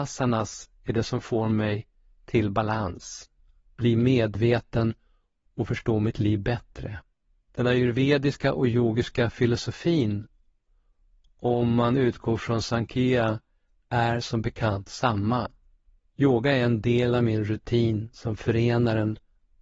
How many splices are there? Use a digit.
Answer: 2